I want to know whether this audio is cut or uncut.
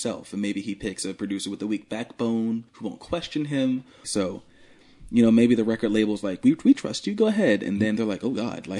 cut